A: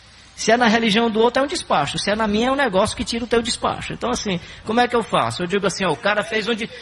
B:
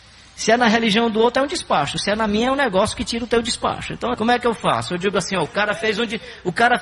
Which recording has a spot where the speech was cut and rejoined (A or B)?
B